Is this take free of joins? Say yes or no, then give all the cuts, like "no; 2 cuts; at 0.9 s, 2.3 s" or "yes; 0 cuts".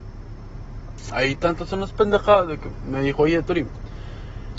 yes; 0 cuts